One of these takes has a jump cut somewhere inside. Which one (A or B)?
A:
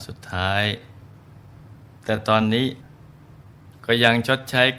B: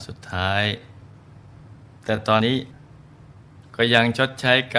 B